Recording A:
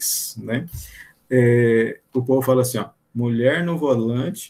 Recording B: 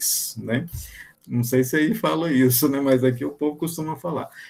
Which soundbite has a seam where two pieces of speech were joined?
B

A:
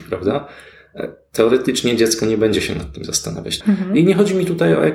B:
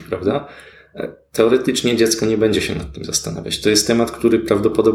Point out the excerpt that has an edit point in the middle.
A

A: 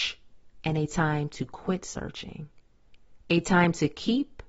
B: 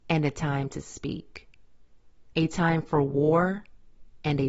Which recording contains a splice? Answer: B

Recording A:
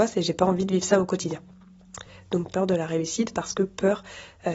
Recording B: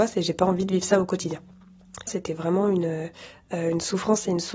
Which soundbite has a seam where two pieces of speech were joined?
B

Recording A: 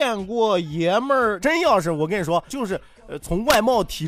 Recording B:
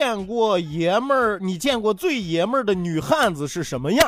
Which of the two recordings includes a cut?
A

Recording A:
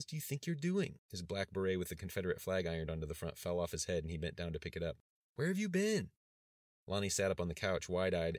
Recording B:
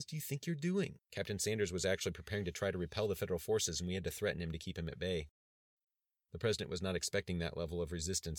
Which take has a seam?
B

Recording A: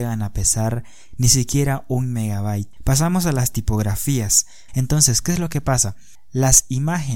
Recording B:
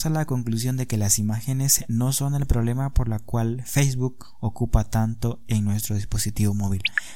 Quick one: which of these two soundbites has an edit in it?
A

